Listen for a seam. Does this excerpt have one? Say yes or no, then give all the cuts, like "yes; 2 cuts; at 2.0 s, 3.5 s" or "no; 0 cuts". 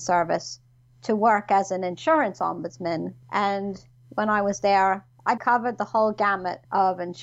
yes; 2 cuts; at 3.2 s, 5.4 s